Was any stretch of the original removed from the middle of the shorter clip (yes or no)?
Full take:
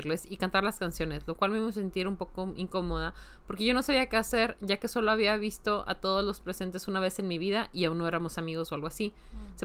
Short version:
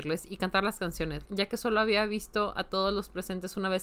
yes